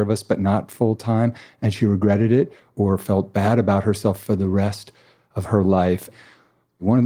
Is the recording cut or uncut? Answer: uncut